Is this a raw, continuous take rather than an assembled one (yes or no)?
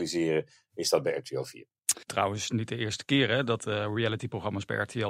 no